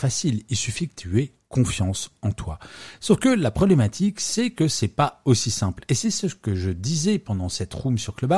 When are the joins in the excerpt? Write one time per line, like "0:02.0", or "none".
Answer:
none